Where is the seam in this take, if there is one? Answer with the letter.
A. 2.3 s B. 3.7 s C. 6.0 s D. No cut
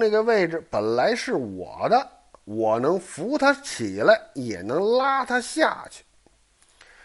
D